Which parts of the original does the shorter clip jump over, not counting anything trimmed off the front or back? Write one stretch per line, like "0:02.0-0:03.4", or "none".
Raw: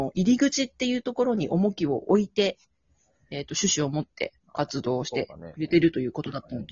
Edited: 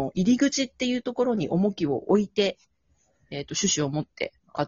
none